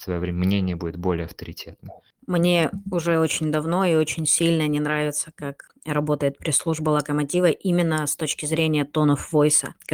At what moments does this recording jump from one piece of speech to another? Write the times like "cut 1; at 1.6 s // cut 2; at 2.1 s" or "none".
none